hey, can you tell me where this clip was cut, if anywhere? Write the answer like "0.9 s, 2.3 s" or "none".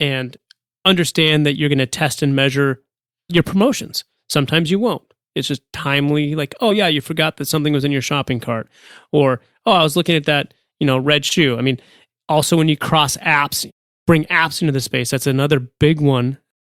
4.2 s